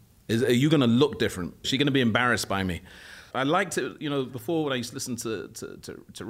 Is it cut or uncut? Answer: cut